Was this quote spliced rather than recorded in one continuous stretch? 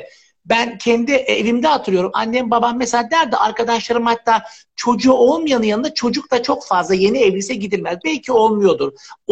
no; 0 cuts

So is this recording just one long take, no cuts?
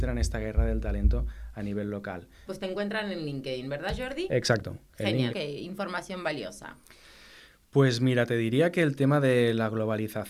no; 2 cuts; at 2.5 s, 5.3 s

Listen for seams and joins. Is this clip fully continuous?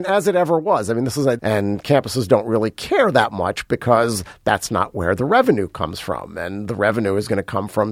no; 1 cut; at 1.4 s

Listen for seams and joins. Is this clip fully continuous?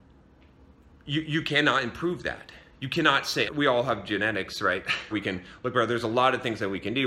no; 2 cuts; at 3.5 s, 5.1 s

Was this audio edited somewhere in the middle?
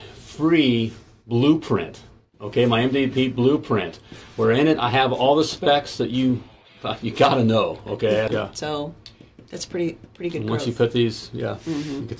yes; 1 cut; at 8.3 s

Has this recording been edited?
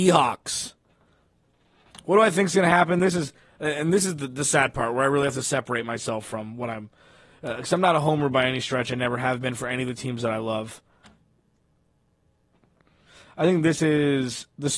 no; 0 cuts

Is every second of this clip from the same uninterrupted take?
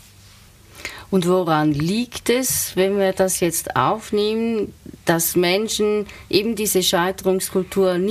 yes; 0 cuts

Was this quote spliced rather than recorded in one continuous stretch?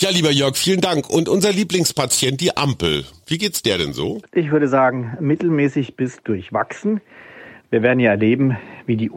no; 0 cuts

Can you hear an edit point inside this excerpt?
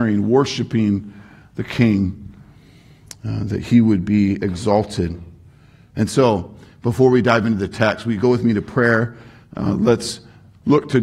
no; 0 cuts

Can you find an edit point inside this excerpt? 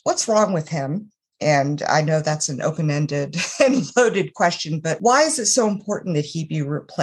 no; 0 cuts

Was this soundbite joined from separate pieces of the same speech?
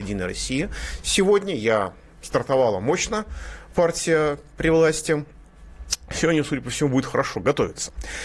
no; 0 cuts

